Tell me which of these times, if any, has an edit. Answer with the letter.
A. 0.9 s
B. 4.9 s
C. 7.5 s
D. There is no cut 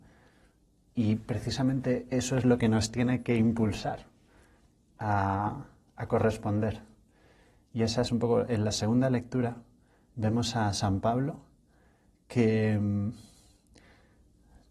D